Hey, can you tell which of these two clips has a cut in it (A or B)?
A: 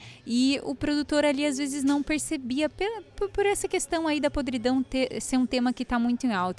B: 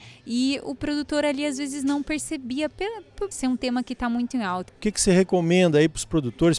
B